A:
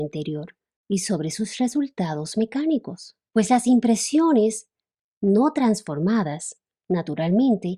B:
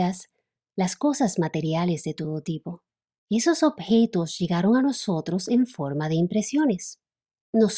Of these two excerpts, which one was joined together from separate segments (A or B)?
A